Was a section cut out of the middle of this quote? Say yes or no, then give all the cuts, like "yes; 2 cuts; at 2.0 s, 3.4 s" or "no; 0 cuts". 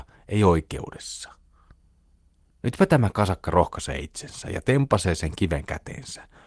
no; 0 cuts